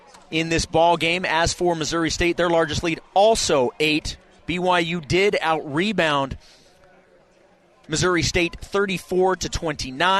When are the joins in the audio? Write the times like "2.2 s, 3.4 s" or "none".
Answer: 4.4 s